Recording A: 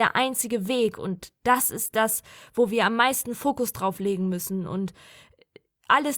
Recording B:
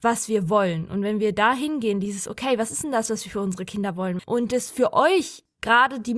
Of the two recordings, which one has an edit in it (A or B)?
B